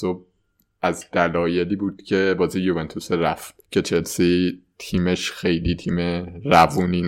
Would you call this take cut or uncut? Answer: cut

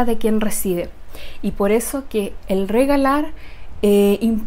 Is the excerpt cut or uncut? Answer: uncut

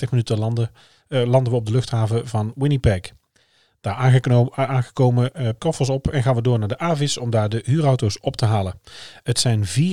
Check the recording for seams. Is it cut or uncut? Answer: cut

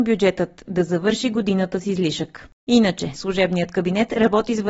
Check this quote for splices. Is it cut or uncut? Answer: cut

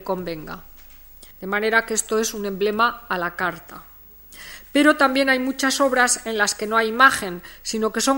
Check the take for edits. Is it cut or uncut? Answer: cut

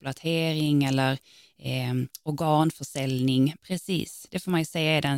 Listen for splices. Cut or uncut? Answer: cut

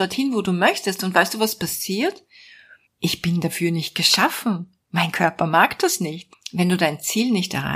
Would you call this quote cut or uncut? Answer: cut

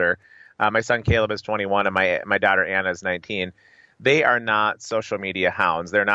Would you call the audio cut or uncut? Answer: uncut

